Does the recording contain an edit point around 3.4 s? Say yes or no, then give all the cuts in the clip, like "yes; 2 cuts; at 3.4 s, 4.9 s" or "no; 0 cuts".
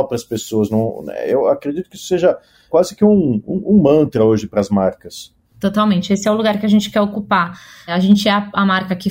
no; 0 cuts